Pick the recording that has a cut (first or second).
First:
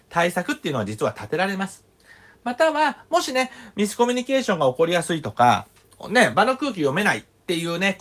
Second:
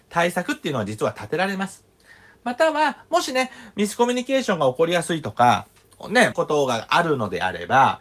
second